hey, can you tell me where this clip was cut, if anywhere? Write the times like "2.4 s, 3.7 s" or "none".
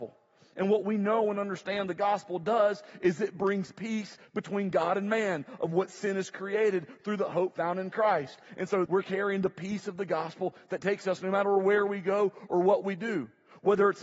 8.9 s